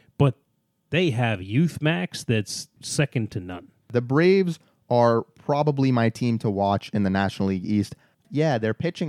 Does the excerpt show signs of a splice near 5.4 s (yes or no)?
no